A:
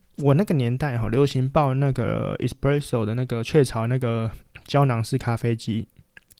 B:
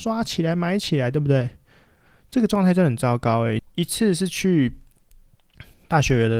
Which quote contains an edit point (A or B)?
B